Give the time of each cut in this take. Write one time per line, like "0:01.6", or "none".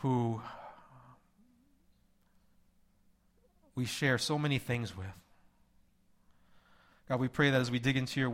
none